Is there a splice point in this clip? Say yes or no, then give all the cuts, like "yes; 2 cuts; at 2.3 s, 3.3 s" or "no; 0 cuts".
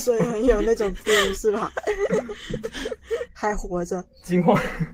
yes; 1 cut; at 3.3 s